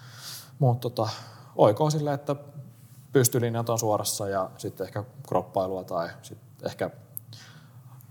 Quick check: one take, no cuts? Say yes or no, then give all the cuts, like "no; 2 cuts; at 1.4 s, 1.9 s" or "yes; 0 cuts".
no; 2 cuts; at 3.1 s, 4.6 s